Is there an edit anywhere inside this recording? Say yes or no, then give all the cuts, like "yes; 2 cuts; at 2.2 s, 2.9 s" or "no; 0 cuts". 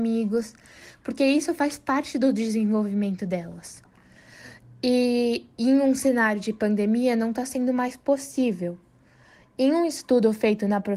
no; 0 cuts